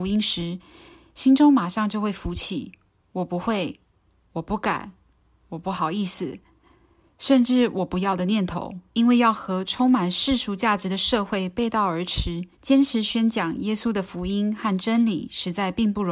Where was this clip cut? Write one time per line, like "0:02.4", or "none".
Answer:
0:08.9
0:12.5